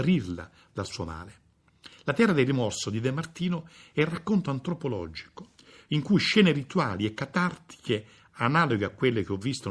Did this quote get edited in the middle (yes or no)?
no